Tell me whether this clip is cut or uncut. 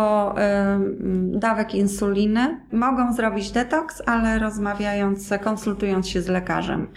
cut